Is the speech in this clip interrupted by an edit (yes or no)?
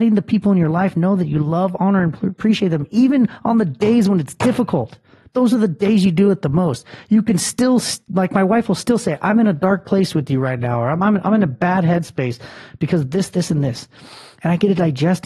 no